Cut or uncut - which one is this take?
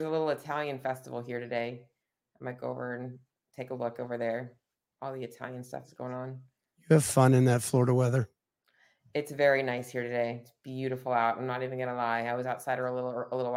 uncut